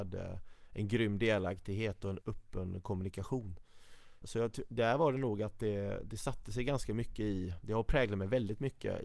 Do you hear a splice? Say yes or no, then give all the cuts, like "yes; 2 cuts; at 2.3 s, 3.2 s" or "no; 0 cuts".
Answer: yes; 2 cuts; at 2.2 s, 4.2 s